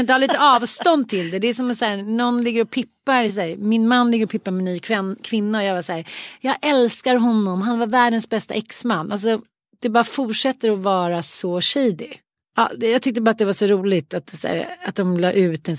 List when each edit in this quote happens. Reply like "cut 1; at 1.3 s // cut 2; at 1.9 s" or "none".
none